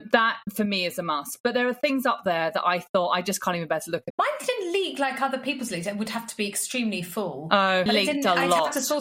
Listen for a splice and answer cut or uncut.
cut